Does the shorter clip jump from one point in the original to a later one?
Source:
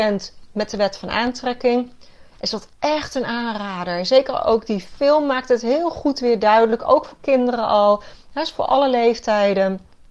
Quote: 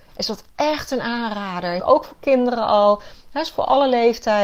yes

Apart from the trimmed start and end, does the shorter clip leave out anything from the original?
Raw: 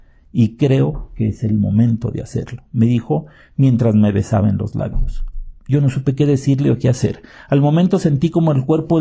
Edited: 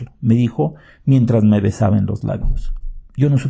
no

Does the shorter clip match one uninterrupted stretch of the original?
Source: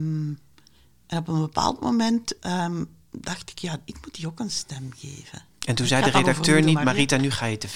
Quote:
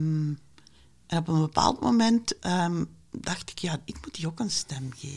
yes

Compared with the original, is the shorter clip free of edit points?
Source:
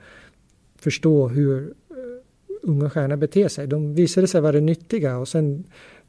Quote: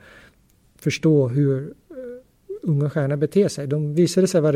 yes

